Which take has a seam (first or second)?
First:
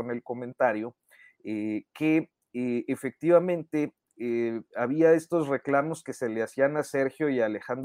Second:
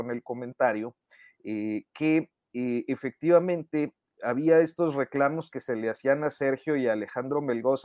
second